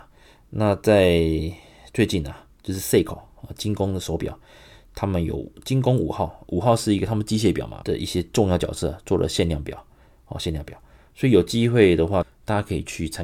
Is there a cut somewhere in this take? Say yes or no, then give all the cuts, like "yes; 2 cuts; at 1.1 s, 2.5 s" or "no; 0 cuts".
yes; 2 cuts; at 7.8 s, 12.2 s